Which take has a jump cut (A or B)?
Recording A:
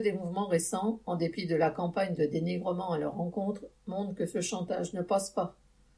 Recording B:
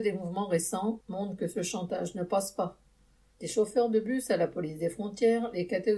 B